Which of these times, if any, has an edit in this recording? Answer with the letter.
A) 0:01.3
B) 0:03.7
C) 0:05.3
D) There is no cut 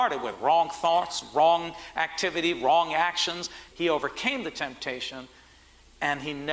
B